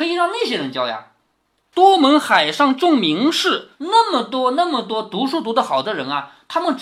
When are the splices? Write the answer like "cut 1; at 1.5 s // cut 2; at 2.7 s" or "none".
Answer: cut 1; at 3.7 s